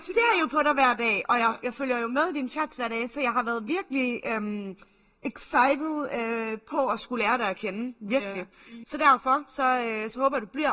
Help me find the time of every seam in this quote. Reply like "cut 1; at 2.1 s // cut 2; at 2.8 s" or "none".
cut 1; at 8.8 s